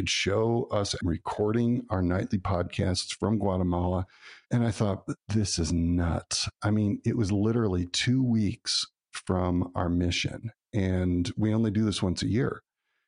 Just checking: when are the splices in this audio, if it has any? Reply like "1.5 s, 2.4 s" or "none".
1.0 s, 4.4 s